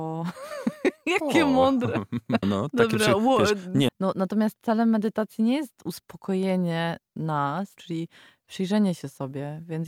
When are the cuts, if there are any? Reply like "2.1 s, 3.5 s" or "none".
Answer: 2.4 s, 3.9 s, 7.8 s